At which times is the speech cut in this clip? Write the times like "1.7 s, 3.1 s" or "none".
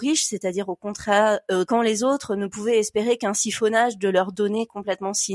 1.7 s